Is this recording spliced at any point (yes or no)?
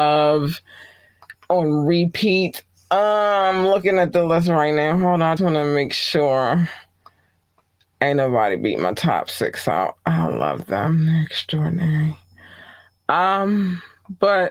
yes